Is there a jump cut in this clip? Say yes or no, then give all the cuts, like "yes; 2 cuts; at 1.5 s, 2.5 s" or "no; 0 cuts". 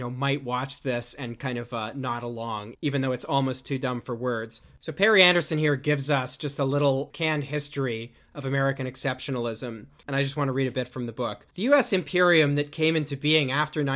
yes; 1 cut; at 11.5 s